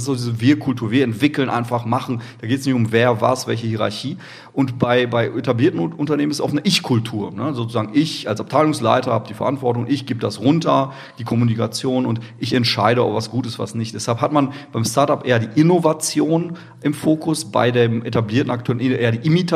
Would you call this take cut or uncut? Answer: uncut